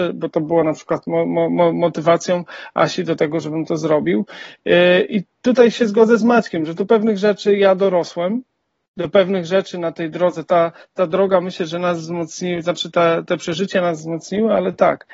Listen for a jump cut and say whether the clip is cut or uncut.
uncut